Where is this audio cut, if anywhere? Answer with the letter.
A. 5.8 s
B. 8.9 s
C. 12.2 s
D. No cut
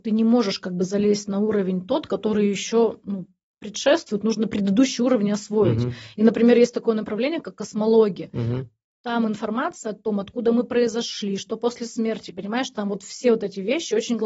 D